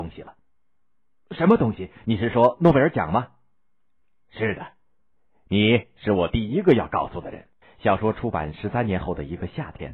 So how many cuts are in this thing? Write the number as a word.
one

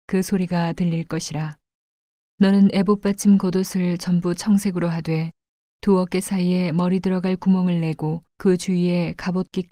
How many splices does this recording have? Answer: two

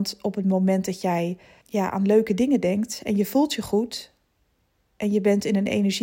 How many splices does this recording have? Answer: one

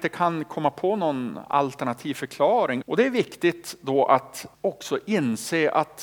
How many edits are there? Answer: two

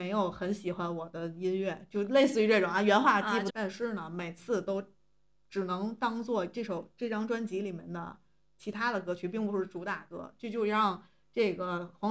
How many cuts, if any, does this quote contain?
one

